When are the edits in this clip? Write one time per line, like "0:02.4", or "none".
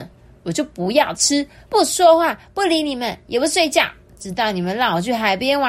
0:01.7